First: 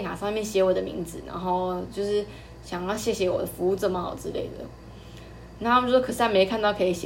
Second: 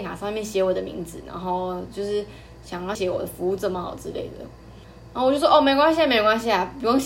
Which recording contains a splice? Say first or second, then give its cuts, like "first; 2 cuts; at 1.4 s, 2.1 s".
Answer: second; 2 cuts; at 3.0 s, 4.8 s